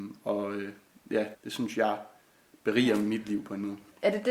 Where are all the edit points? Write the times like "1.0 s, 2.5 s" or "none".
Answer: 1.3 s